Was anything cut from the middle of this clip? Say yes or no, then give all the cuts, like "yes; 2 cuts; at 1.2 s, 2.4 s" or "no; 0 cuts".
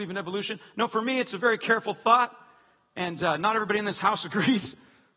no; 0 cuts